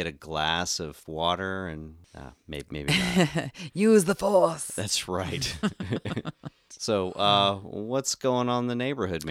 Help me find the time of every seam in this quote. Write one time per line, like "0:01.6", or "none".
none